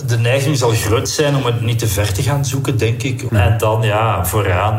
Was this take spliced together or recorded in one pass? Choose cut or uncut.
cut